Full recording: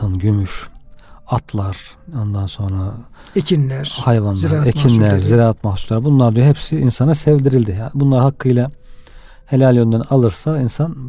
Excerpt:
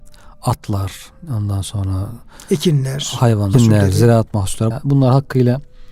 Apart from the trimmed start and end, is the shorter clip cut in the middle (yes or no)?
yes